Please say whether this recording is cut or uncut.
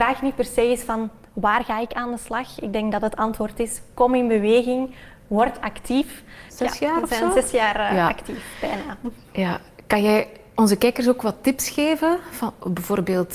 cut